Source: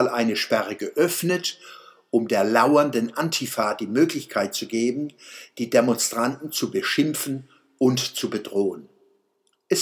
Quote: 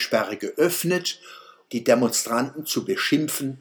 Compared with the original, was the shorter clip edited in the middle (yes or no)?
yes